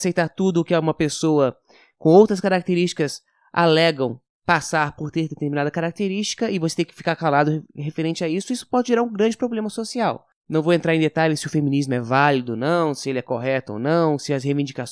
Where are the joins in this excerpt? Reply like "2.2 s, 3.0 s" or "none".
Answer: none